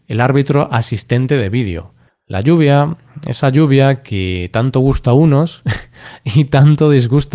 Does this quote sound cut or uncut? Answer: cut